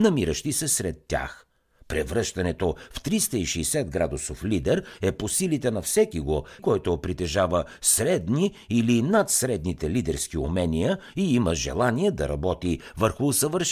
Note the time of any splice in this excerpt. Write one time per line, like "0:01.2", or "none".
0:06.6